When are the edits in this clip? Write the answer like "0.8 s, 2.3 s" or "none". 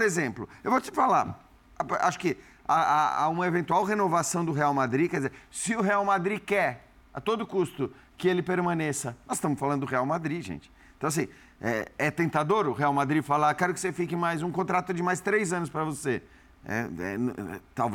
none